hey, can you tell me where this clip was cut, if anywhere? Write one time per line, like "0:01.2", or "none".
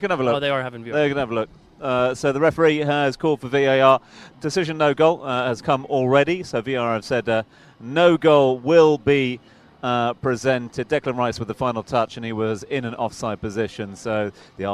0:04.3